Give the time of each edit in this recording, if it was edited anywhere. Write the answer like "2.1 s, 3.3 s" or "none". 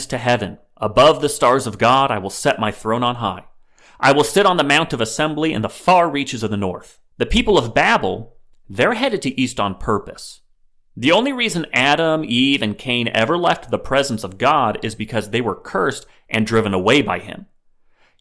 7.1 s